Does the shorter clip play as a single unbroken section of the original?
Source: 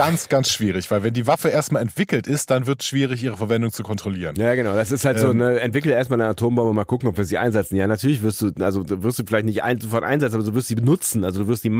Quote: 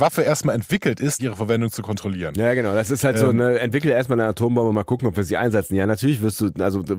no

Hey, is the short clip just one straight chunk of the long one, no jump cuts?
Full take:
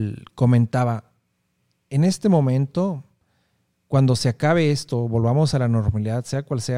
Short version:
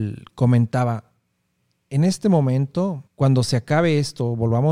no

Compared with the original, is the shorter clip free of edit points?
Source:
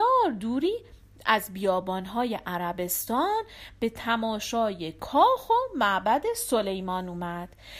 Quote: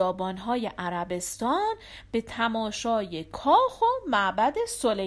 yes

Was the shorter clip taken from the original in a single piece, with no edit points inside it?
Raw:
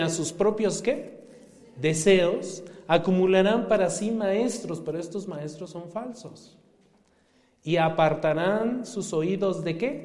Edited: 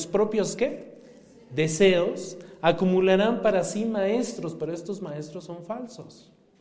yes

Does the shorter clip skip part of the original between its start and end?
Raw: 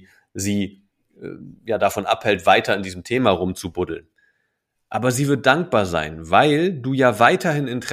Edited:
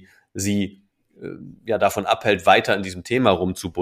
no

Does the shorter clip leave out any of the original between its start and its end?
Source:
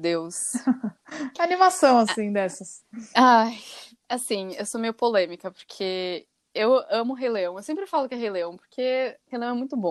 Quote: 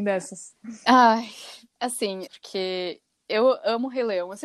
yes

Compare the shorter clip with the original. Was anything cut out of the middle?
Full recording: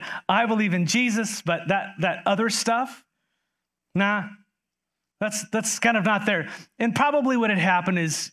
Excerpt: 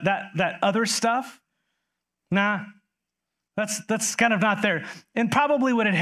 no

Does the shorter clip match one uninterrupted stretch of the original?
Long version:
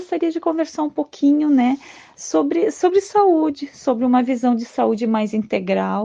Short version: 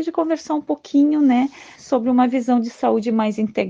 no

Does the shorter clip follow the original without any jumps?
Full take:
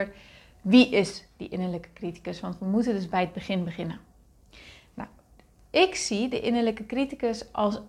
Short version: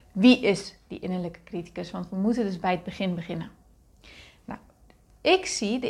yes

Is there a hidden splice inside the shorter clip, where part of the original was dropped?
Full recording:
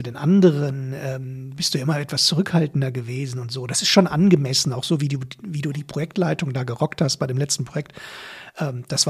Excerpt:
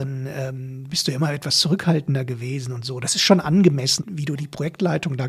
yes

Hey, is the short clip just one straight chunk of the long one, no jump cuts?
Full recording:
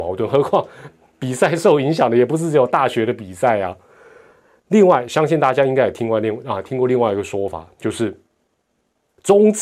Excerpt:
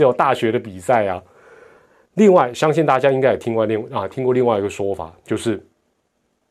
yes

